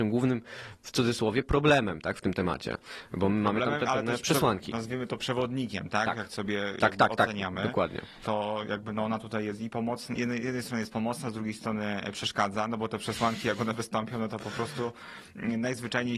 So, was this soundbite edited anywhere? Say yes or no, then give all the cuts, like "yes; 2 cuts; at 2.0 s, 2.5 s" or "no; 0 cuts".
no; 0 cuts